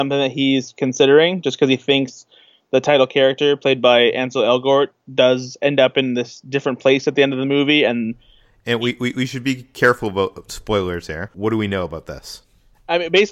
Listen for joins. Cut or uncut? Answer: cut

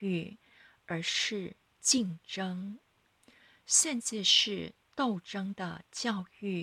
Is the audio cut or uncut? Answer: uncut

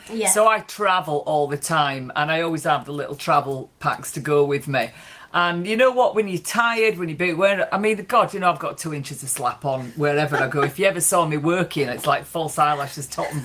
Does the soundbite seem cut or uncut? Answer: uncut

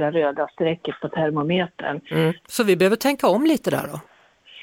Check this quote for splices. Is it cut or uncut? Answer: cut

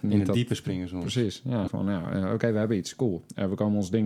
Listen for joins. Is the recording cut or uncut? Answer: cut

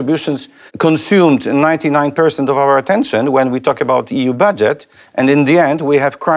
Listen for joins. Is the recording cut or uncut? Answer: uncut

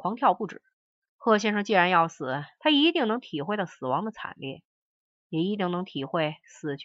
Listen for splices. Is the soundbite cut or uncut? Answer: cut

